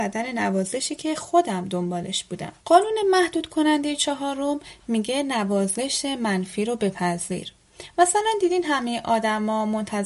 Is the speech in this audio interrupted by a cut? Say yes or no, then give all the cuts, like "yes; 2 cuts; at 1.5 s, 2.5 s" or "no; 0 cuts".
yes; 1 cut; at 2.6 s